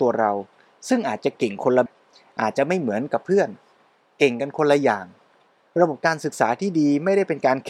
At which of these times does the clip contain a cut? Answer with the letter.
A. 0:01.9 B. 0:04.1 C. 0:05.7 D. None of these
A